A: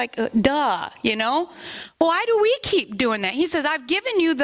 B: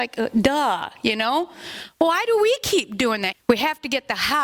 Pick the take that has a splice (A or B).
B